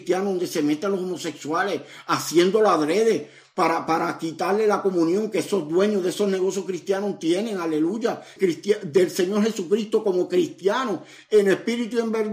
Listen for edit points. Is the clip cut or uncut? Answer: cut